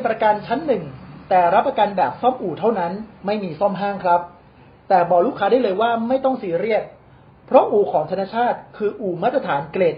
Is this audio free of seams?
yes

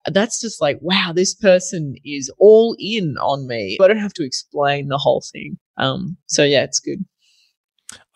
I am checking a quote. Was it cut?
yes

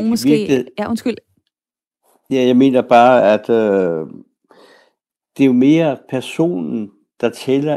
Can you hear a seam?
no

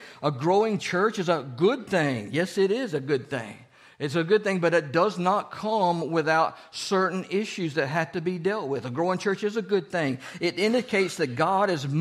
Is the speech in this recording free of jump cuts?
yes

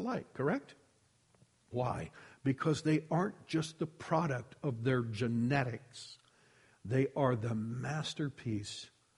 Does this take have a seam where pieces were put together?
yes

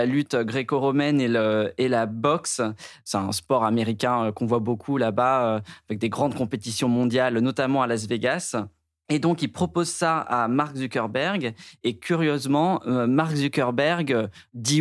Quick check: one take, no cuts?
yes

